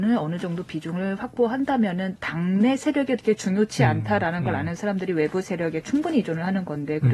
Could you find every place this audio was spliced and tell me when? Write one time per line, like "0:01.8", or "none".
none